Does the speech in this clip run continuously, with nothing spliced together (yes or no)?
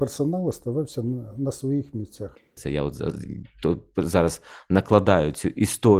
no